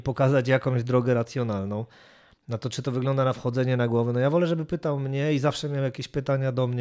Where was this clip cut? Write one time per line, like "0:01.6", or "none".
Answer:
none